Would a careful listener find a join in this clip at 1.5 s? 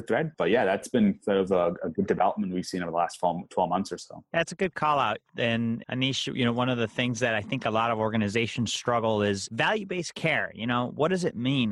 no; 0 cuts

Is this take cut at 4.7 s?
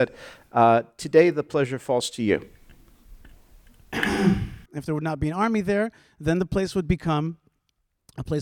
yes; 1 cut; at 4.7 s

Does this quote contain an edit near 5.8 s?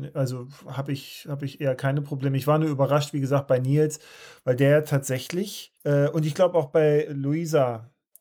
yes; 2 cuts; at 5.8 s, 7.1 s

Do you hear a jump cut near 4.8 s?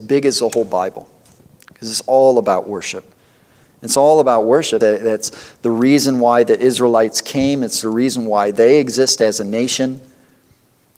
yes; 1 cut; at 4.8 s

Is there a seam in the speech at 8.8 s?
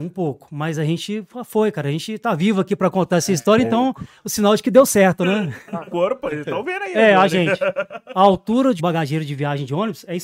yes; 2 cuts; at 5.9 s, 8.8 s

